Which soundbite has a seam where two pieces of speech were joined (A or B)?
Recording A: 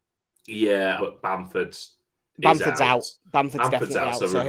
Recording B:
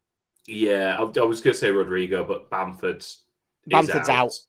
A